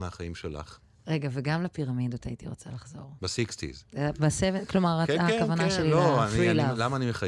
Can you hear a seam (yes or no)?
yes